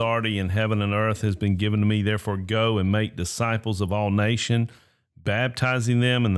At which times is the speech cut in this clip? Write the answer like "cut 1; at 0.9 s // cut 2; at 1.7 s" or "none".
none

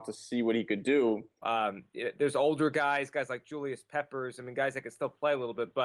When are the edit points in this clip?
cut 1; at 1.4 s

